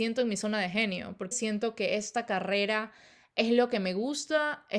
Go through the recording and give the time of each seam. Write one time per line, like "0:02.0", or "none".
0:01.3